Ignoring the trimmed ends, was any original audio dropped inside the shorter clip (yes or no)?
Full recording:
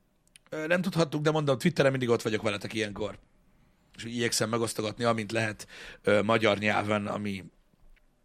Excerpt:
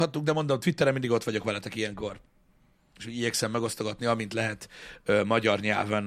no